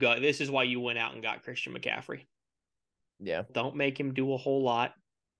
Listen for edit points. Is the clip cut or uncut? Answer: cut